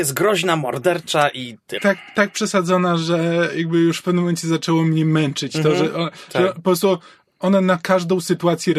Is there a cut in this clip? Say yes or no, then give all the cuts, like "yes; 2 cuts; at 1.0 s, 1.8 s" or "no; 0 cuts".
yes; 1 cut; at 1.8 s